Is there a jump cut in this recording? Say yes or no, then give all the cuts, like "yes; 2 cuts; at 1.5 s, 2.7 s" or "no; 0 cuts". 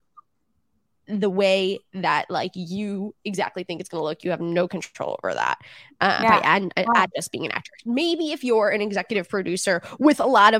yes; 1 cut; at 6.2 s